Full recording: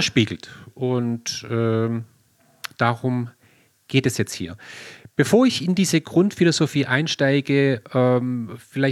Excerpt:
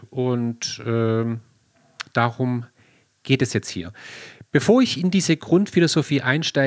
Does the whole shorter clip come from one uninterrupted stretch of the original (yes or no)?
yes